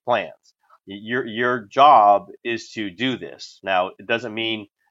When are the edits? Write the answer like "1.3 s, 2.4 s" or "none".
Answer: none